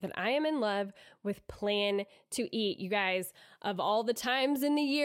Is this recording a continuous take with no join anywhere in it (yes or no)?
yes